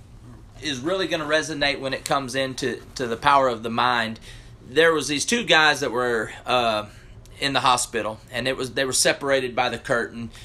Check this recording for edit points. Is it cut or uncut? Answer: uncut